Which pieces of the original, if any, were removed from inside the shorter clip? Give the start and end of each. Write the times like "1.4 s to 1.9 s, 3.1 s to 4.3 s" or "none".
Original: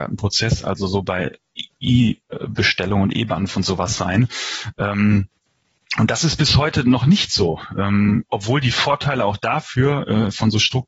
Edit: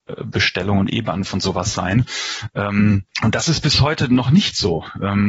5.3 s to 5.9 s